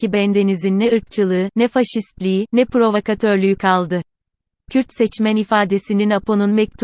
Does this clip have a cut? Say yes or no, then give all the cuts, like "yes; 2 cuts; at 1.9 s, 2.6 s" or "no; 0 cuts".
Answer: no; 0 cuts